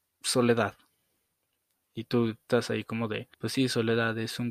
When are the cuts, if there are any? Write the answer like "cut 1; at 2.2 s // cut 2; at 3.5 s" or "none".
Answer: cut 1; at 3.3 s